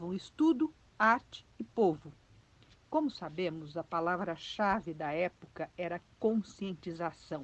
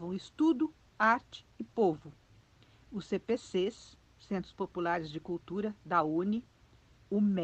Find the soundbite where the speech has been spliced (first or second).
first